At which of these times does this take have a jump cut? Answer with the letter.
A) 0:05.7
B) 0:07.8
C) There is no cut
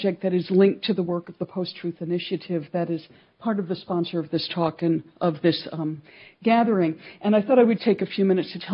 B